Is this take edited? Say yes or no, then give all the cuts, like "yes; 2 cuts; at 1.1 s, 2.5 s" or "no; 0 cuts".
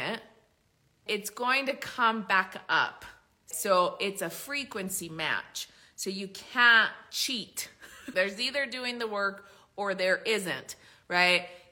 yes; 3 cuts; at 1.1 s, 3.5 s, 8.1 s